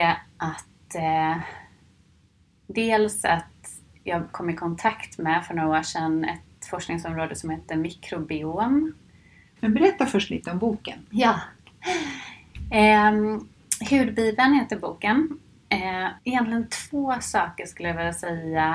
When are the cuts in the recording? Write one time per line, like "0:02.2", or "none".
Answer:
0:09.6
0:16.2